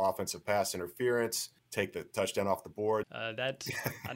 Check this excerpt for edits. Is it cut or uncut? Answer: cut